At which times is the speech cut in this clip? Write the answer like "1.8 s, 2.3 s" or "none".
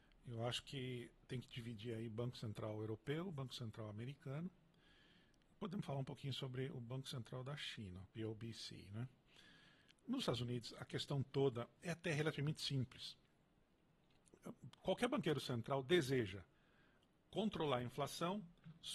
none